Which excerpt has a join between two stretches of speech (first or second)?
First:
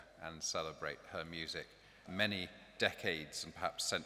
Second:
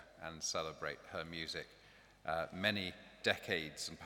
first